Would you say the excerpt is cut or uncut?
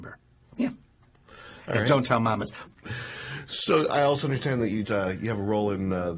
cut